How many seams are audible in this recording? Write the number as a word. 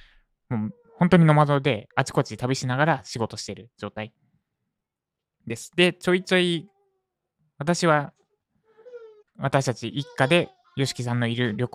two